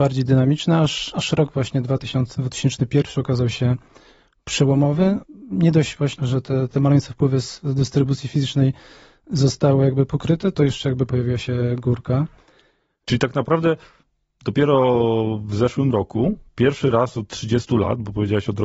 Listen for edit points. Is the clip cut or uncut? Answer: uncut